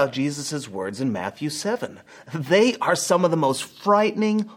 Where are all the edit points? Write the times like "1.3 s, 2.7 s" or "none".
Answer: none